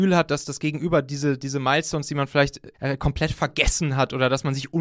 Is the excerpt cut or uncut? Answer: cut